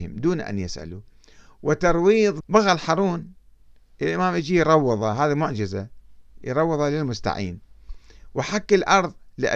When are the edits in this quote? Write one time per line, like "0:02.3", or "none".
0:02.4